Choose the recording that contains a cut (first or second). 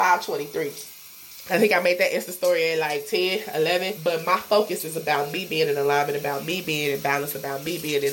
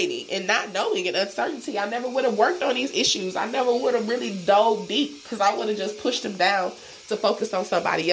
first